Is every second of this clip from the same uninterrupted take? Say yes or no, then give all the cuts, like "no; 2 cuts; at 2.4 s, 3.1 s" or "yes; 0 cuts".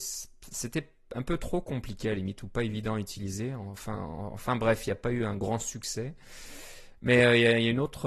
yes; 0 cuts